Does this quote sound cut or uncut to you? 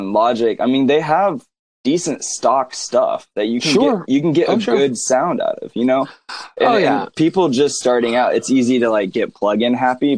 uncut